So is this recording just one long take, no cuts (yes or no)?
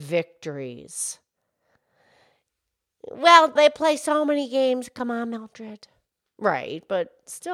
no